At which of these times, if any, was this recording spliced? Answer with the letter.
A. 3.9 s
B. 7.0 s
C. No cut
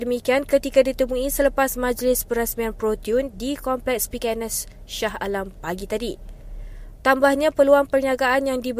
B